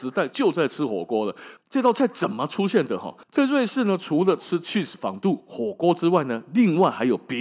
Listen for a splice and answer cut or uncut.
cut